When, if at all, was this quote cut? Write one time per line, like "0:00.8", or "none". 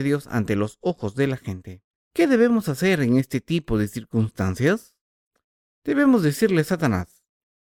0:02.0

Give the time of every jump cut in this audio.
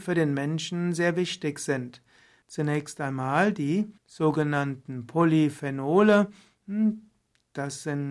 0:02.4
0:04.0

